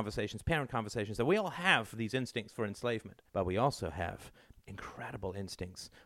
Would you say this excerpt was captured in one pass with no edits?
no; 1 cut; at 3.3 s

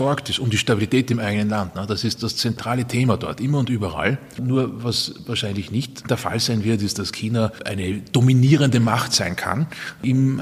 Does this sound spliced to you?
yes; 2 cuts; at 2.2 s, 4.4 s

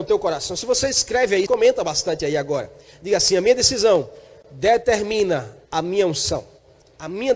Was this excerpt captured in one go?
no; 2 cuts; at 1.5 s, 5.6 s

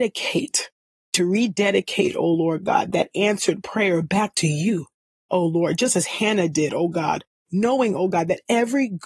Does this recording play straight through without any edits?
yes; 0 cuts

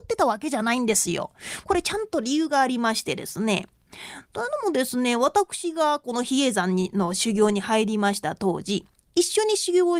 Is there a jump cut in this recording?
no; 0 cuts

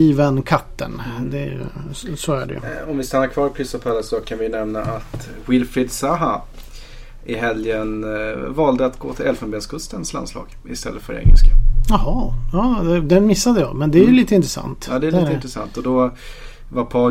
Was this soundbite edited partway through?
no; 0 cuts

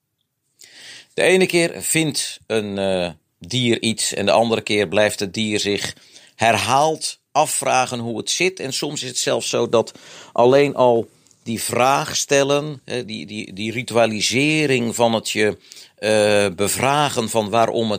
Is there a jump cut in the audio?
no; 0 cuts

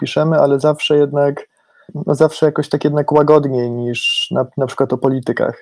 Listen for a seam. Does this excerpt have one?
no; 0 cuts

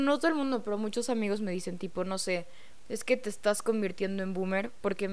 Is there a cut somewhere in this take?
no; 0 cuts

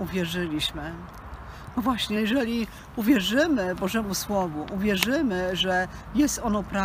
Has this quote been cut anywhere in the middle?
no; 0 cuts

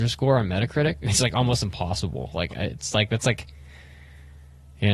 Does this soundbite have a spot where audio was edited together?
no; 0 cuts

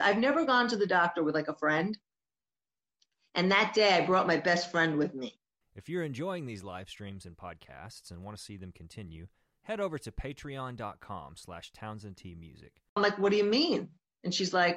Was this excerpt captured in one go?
no; 2 cuts; at 5.6 s, 13.0 s

